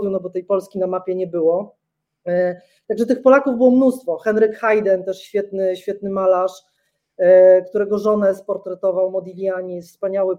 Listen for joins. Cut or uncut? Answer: uncut